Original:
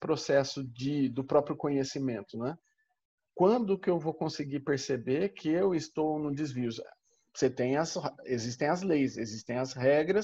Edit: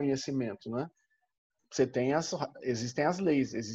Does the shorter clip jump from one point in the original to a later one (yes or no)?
yes